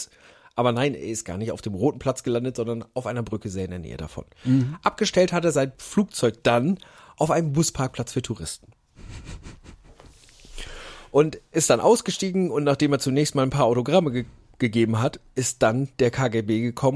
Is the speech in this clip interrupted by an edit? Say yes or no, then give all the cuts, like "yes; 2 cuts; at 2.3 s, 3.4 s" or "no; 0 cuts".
no; 0 cuts